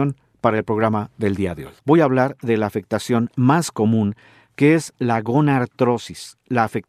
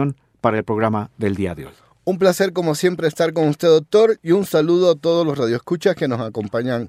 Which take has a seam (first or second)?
first